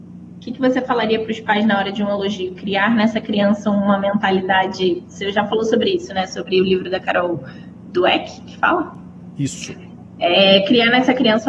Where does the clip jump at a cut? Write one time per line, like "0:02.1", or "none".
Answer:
none